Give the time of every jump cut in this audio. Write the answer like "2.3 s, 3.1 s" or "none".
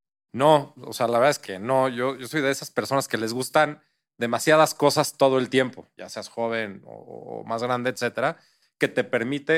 6.0 s